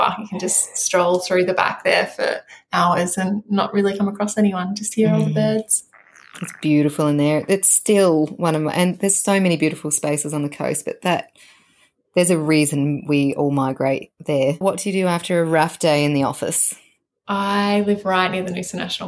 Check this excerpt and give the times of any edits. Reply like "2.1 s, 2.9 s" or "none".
14.6 s